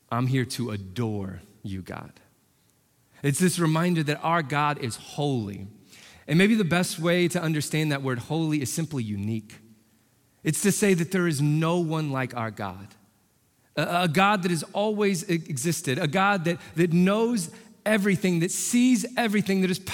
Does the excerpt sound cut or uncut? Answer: uncut